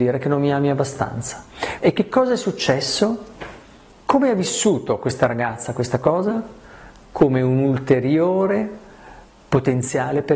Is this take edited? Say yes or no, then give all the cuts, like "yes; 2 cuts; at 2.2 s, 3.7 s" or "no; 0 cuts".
yes; 1 cut; at 1.8 s